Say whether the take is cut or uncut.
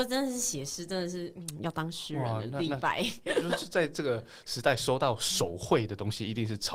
uncut